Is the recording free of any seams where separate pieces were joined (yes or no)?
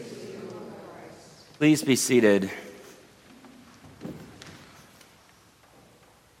yes